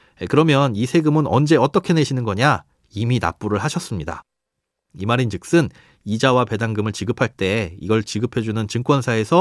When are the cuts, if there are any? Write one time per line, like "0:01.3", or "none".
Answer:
0:04.9